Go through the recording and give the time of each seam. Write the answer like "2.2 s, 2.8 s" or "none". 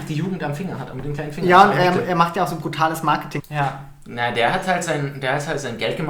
3.4 s